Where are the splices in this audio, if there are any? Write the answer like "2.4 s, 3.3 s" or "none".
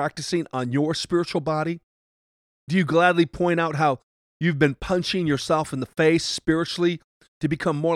none